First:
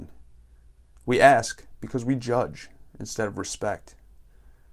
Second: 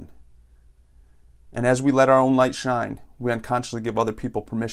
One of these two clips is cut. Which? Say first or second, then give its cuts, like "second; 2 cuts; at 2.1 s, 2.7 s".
first; 1 cut; at 0.9 s